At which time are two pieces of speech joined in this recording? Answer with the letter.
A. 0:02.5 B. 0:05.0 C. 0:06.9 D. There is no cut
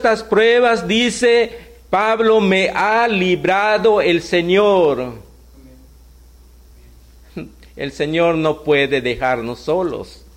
D